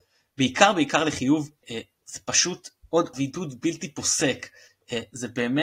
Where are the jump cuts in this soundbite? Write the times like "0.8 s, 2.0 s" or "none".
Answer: 1.6 s, 3.1 s

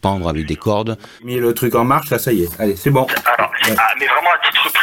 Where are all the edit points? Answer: 1.2 s

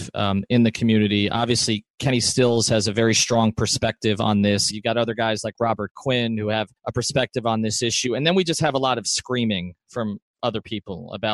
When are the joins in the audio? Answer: 4.7 s, 6.8 s

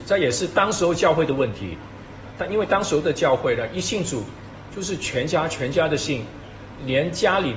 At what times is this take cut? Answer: none

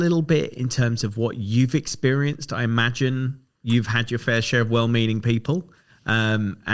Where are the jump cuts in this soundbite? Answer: none

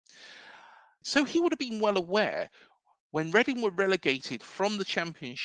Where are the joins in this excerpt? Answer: 1.0 s

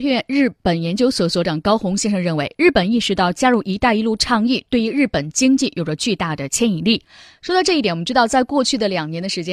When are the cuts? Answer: none

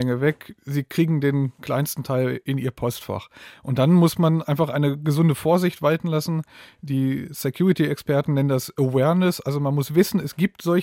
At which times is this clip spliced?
none

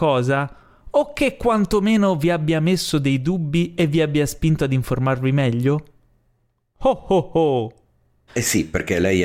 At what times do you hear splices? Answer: 8.3 s

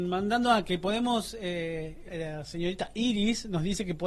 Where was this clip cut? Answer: 2.1 s

